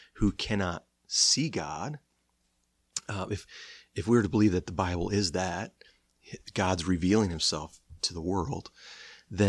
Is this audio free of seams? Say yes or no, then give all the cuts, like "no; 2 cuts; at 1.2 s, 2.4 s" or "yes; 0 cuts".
yes; 0 cuts